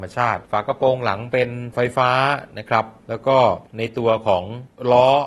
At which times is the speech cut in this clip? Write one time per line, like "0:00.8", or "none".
none